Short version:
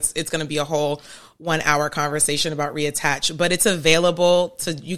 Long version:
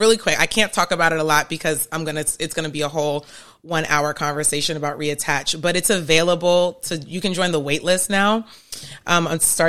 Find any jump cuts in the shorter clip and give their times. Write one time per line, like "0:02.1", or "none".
none